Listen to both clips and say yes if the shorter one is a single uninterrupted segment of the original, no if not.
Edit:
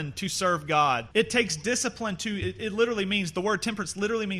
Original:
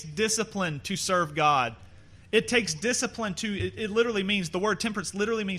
no